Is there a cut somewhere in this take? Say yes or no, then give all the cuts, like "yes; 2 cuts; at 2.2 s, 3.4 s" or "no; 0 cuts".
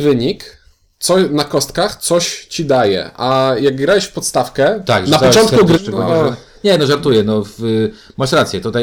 yes; 1 cut; at 5.8 s